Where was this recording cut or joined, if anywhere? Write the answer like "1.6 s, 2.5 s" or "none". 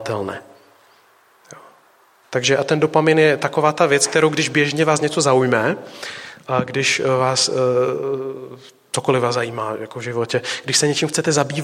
none